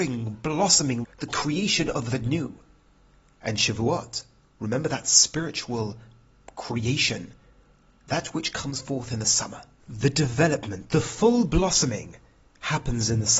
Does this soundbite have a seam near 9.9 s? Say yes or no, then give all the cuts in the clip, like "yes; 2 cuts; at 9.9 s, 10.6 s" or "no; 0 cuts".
no; 1 cut; at 1.0 s